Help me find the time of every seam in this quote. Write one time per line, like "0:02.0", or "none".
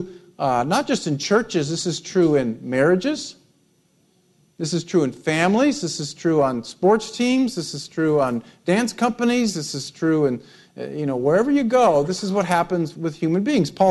0:12.9